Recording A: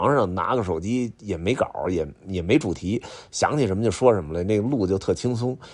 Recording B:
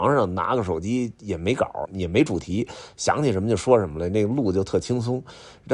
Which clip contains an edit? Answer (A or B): B